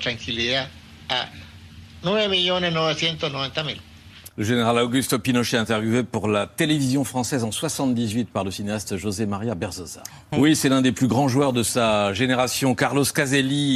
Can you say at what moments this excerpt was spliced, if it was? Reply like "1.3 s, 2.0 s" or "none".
4.3 s, 10.3 s